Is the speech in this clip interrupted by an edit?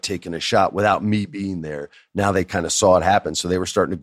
no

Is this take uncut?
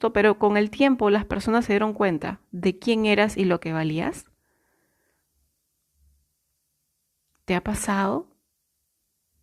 yes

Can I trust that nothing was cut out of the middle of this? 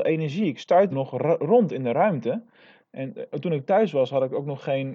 no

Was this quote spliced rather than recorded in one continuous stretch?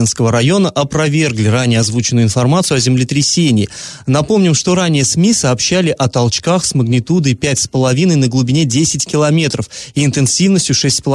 no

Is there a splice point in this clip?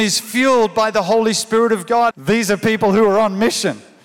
yes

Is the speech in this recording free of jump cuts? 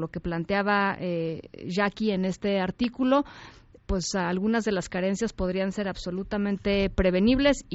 yes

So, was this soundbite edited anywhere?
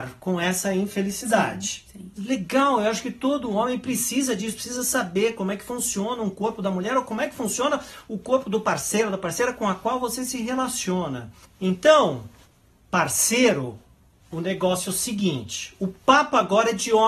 yes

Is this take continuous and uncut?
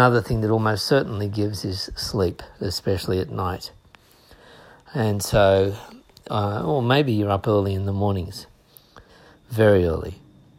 yes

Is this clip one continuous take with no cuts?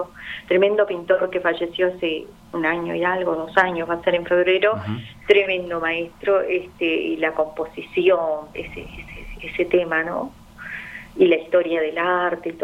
no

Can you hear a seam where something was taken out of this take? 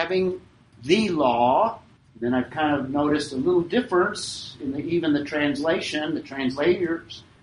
no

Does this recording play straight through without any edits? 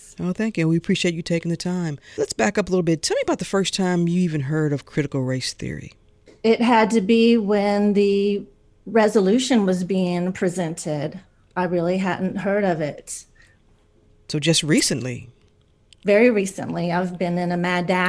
yes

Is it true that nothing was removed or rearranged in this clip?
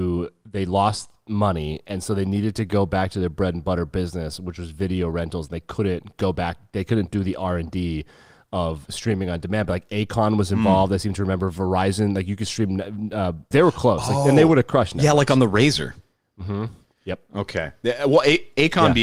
no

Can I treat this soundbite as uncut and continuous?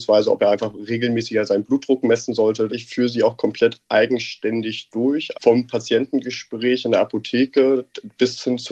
no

